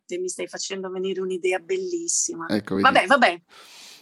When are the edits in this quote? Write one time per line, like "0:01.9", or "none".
none